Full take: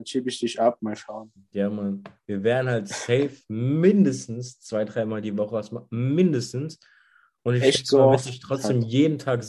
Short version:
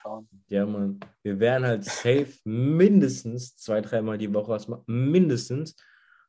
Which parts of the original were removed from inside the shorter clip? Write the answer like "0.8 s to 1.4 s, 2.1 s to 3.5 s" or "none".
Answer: none